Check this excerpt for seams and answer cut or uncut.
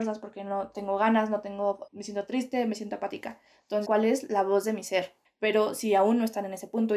cut